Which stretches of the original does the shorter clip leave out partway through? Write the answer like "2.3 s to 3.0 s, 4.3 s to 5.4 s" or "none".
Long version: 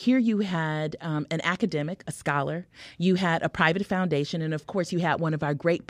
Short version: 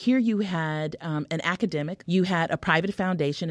2.0 s to 3.0 s